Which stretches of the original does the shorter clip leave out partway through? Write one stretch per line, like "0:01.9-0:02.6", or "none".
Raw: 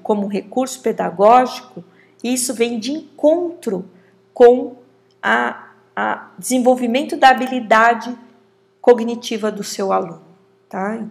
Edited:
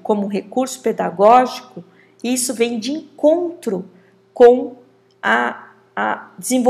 none